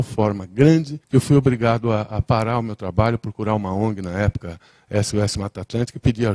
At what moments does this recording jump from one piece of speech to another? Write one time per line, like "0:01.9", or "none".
0:01.0